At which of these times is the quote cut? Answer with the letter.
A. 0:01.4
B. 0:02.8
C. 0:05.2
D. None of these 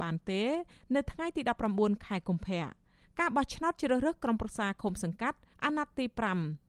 D